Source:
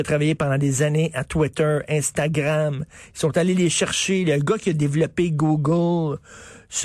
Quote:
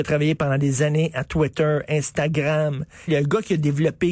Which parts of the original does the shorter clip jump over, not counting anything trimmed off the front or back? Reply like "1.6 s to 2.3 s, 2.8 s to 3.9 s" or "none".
3.1 s to 4.2 s